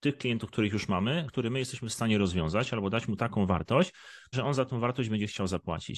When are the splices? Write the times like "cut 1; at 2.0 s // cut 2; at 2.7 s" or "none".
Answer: cut 1; at 1.3 s // cut 2; at 4.3 s